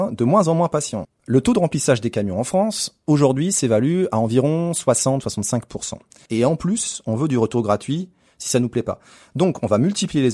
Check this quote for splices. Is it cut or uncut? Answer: cut